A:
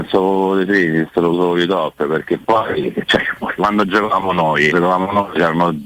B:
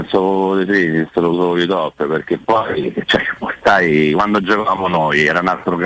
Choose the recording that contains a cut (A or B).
A